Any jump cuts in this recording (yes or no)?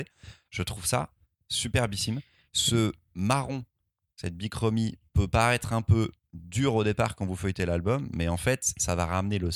no